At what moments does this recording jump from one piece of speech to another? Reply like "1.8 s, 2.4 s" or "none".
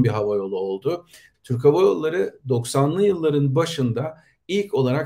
1.3 s